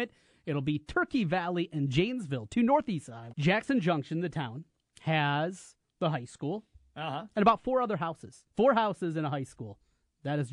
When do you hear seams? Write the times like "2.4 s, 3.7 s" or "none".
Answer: 3.3 s, 8.5 s